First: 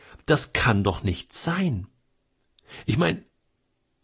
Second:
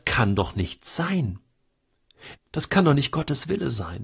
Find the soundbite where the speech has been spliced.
second; 1 cut; at 2.3 s

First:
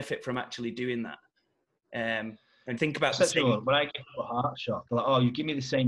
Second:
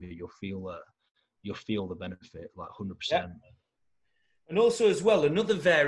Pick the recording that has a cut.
first; 2 cuts; at 2.8 s, 4.9 s

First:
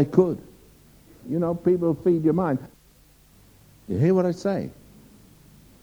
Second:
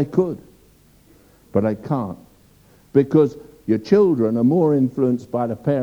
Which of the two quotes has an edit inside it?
first; 1 cut; at 1.2 s

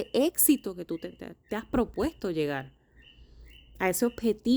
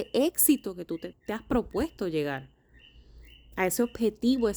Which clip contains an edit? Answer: second; 1 cut; at 1.1 s

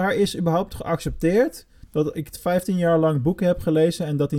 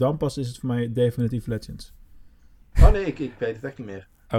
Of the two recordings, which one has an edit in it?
second; 1 cut; at 2.7 s

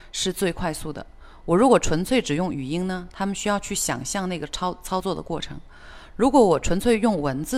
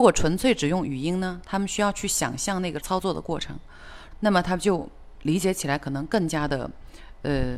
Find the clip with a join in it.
second; 2 cuts; at 2.8 s, 4.1 s

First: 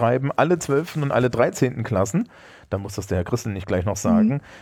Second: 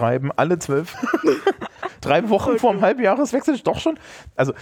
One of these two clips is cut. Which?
second; 1 cut; at 0.9 s

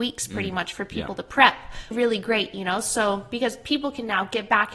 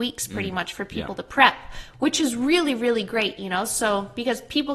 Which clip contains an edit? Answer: first; 1 cut; at 1.9 s

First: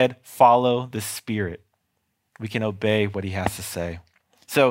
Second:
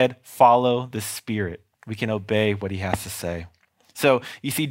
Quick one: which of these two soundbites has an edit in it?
second; 1 cut; at 1.7 s

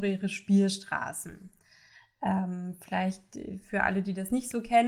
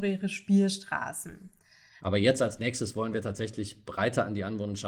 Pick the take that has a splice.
second; 1 cut; at 2.0 s

